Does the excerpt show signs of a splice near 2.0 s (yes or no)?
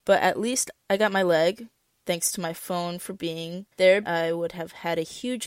no